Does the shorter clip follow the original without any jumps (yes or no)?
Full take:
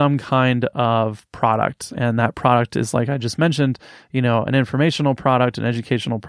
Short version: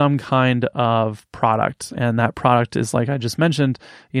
yes